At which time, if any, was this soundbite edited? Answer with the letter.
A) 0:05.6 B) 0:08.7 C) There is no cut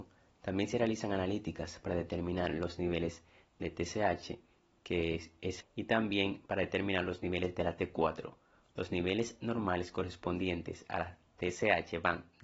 A